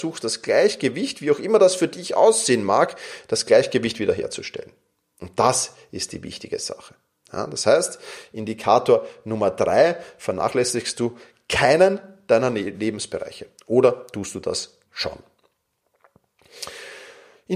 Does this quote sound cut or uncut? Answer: cut